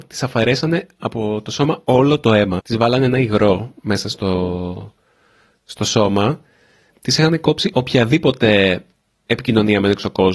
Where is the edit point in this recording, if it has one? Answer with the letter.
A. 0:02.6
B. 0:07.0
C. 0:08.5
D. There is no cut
A